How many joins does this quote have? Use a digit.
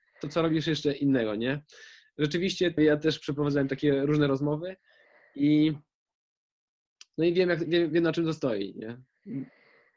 1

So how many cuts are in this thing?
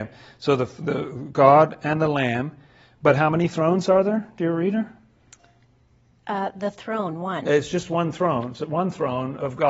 1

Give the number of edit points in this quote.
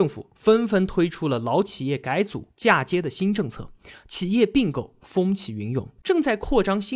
1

